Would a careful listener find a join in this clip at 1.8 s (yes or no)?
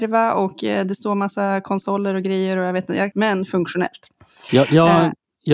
no